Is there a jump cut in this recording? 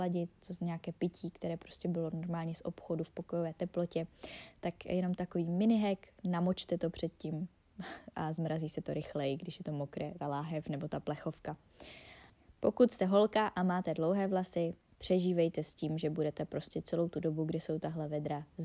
no; 0 cuts

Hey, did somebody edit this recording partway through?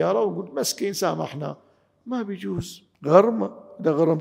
yes; 1 cut; at 2.9 s

